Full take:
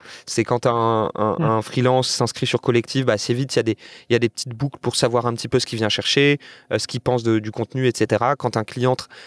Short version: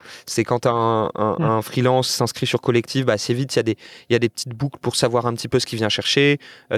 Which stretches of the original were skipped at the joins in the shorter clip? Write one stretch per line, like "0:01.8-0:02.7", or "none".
none